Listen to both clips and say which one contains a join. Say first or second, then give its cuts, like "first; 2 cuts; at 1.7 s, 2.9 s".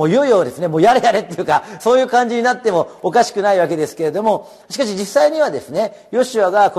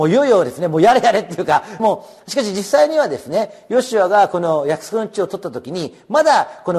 second; 1 cut; at 1.8 s